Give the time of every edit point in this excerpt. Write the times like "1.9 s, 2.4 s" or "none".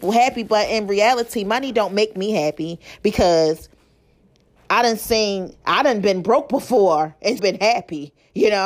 7.4 s